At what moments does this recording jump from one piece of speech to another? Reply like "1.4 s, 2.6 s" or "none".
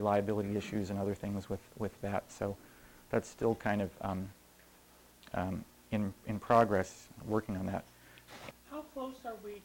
8.5 s